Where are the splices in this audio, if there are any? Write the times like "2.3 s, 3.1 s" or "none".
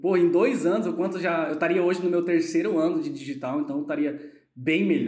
none